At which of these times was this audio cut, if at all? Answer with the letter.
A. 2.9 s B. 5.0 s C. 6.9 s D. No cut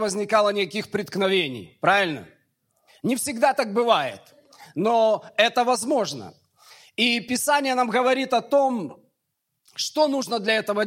A